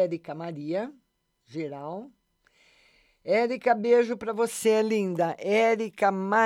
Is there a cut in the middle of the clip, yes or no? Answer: no